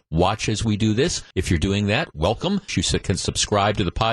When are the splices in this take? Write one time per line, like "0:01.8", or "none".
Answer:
0:01.3
0:02.7